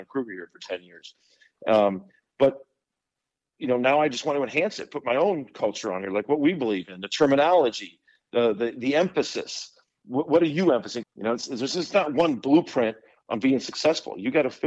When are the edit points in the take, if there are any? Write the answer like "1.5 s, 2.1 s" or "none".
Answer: 11.0 s